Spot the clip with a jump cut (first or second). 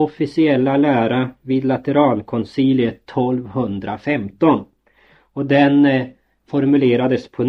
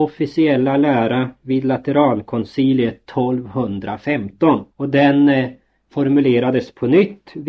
second